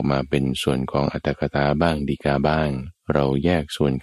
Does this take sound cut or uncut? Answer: cut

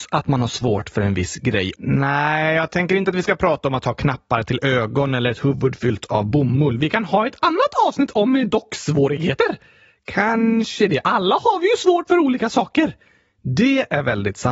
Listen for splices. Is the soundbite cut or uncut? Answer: cut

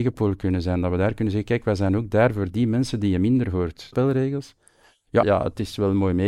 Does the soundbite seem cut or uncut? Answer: cut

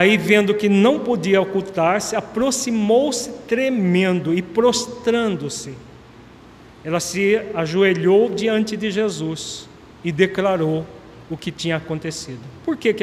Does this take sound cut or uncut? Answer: uncut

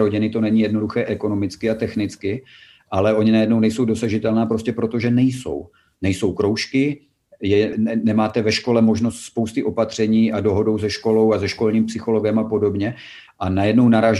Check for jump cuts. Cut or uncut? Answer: cut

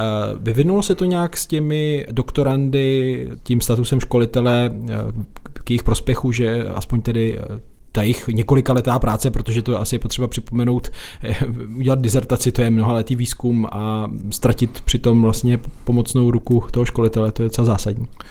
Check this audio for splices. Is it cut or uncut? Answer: uncut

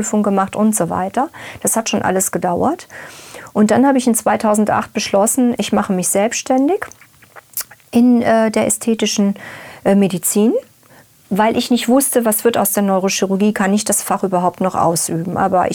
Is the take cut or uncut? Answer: cut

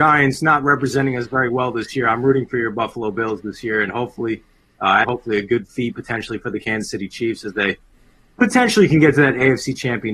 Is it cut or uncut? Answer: cut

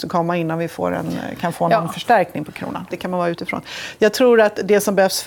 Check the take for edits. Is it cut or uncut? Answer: cut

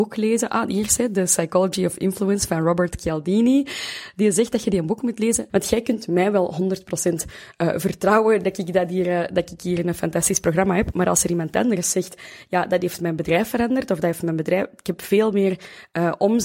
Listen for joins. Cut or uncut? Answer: cut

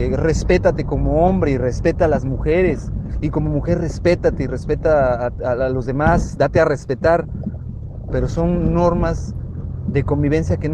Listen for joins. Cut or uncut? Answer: cut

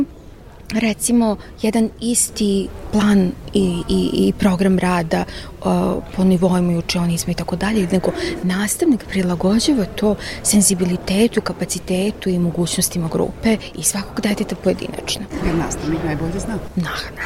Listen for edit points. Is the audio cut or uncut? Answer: uncut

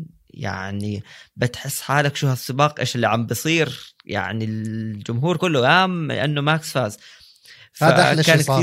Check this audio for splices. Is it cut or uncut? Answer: cut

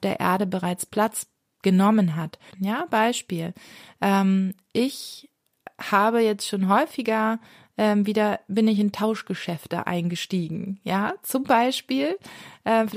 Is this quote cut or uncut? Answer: cut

